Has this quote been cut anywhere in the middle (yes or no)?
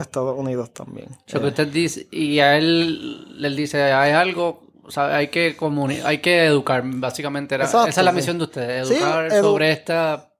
no